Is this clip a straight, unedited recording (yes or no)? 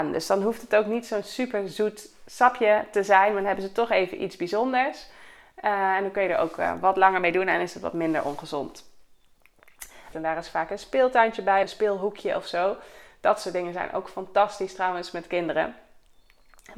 no